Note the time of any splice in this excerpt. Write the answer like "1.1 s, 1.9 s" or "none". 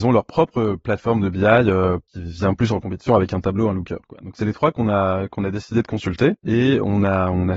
2.0 s